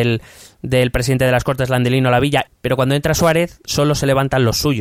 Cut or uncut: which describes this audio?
cut